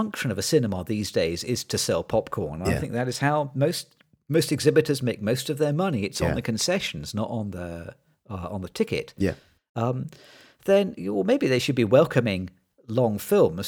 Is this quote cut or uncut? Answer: uncut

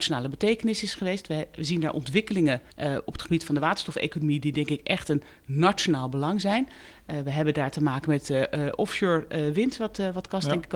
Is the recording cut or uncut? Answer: cut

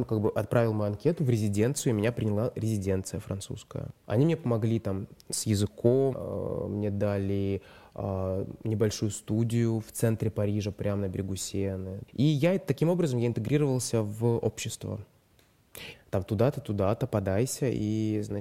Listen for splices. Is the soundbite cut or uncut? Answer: cut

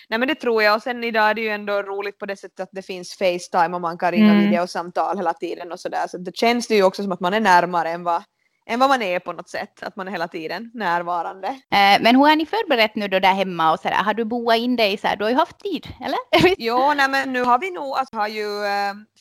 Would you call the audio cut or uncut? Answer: cut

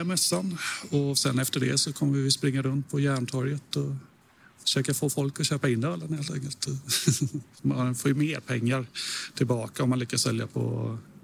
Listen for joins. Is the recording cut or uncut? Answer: cut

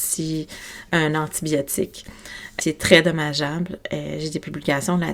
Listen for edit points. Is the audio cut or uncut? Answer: cut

